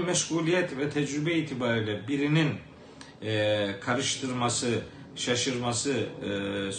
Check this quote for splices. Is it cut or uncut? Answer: uncut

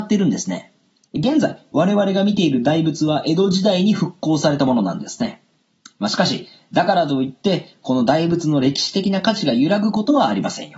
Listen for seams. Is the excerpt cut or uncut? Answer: cut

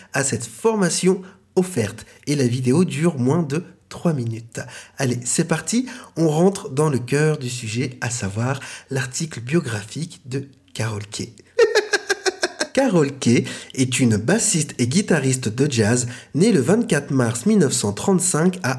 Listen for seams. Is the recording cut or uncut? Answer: cut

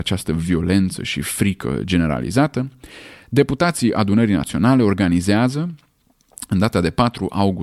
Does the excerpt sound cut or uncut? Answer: uncut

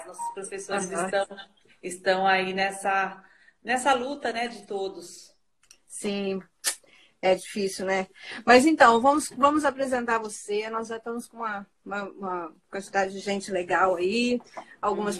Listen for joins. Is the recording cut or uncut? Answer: uncut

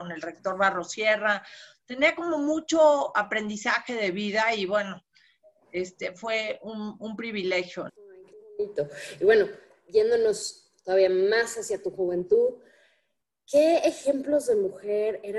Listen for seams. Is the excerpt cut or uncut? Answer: cut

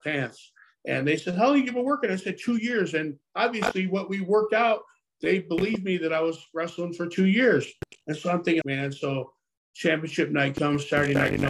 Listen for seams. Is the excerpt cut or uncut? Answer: cut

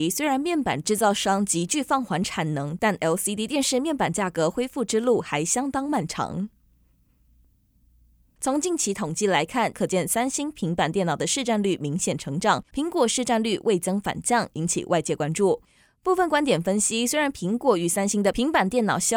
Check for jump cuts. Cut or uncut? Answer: cut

